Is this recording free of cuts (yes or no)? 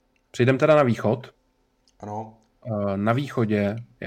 yes